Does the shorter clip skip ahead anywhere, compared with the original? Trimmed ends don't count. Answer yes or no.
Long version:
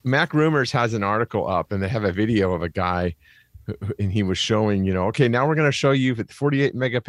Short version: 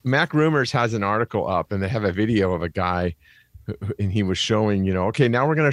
no